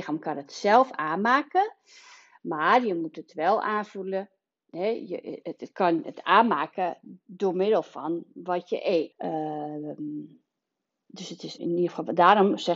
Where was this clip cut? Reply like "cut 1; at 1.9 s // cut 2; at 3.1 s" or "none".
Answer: cut 1; at 9.1 s // cut 2; at 11.6 s